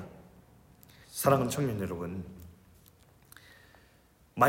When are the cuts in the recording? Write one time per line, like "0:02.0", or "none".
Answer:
0:01.0